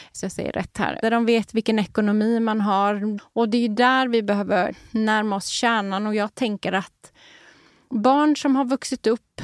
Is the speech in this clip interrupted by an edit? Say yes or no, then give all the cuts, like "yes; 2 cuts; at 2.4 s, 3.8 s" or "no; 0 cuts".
yes; 2 cuts; at 1.0 s, 3.2 s